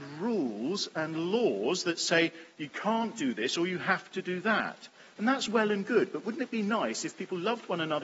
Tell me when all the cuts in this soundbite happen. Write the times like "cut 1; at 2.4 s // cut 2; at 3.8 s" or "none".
none